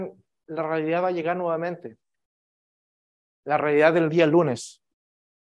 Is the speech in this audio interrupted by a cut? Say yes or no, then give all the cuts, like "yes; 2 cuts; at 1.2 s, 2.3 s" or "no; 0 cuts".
no; 0 cuts